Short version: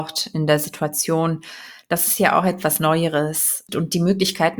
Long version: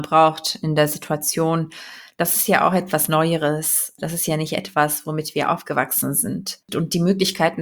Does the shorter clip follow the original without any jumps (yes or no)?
no